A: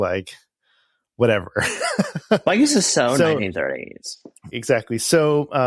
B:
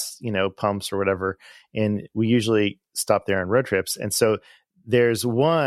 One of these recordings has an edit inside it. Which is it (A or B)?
A